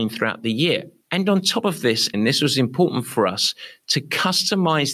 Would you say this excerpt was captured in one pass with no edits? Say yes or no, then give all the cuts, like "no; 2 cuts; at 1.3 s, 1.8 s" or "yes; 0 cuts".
no; 2 cuts; at 1.0 s, 2.1 s